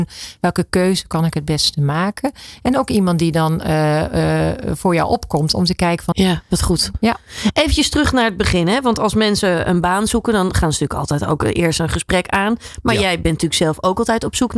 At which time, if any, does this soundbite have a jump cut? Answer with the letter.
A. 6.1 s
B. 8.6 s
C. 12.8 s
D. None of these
A